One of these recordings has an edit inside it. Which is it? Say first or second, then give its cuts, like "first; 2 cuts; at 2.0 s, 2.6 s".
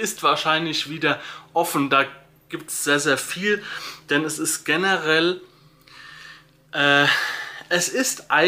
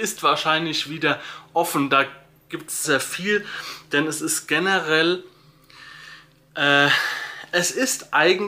second; 1 cut; at 2.8 s